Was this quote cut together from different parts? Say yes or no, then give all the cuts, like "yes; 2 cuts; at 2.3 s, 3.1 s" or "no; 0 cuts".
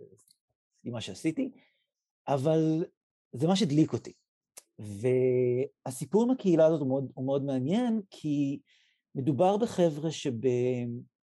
no; 0 cuts